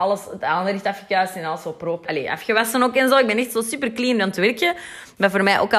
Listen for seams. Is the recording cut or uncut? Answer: cut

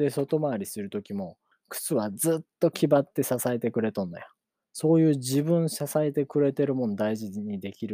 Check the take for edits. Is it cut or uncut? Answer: cut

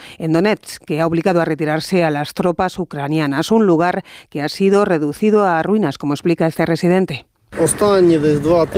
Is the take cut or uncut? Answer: uncut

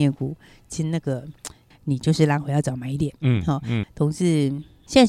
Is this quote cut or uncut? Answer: cut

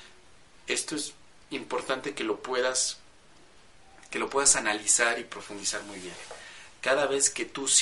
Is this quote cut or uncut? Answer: uncut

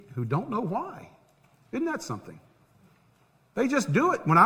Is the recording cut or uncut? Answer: uncut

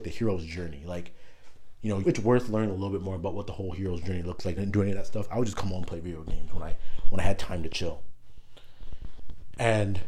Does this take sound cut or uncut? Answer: cut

